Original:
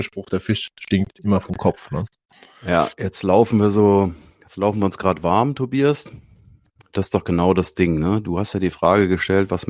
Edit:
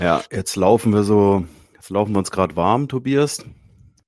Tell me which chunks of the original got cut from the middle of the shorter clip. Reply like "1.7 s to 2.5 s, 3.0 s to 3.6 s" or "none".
none